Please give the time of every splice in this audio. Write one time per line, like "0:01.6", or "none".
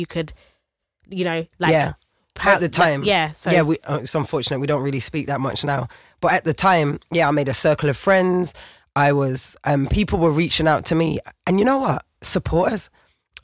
none